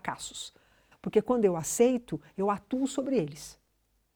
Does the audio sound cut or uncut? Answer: cut